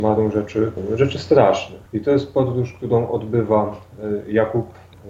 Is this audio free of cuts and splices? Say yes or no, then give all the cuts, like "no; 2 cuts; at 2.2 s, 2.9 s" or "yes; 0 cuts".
no; 1 cut; at 1.9 s